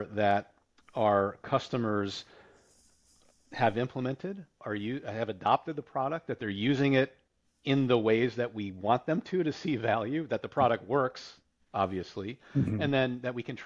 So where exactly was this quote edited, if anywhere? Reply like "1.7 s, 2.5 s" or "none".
none